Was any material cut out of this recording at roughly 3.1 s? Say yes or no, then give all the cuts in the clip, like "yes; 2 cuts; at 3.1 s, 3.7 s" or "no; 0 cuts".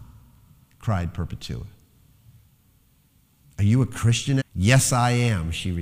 no; 1 cut; at 4.4 s